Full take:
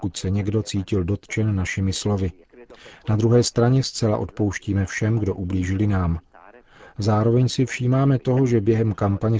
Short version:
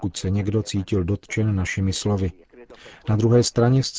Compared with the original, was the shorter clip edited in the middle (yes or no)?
no